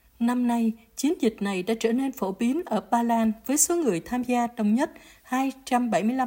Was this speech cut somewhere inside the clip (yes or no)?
no